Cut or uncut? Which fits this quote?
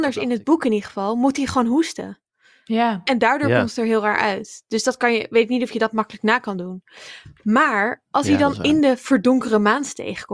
uncut